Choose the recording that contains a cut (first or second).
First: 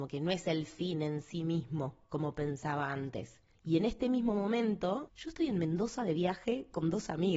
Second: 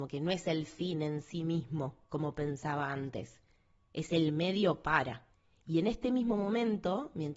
first